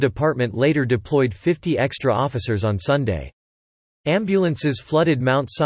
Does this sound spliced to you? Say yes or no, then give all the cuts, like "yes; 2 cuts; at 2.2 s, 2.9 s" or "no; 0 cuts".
no; 0 cuts